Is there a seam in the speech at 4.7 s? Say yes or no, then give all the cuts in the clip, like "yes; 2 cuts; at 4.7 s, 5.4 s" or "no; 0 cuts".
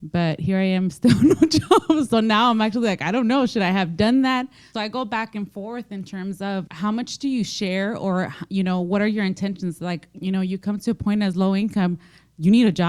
yes; 2 cuts; at 4.7 s, 6.7 s